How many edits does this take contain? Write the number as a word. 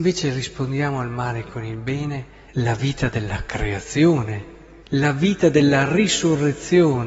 two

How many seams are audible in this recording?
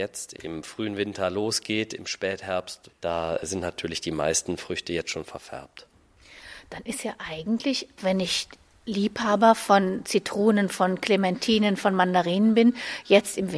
zero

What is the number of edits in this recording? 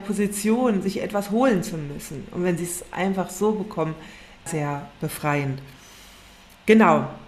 one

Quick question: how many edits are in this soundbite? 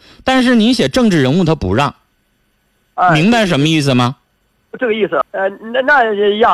one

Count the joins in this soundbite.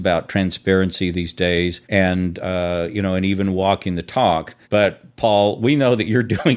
two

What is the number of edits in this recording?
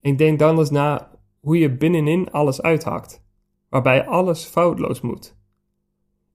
zero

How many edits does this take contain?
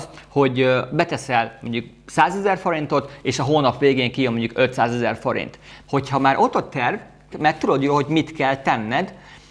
two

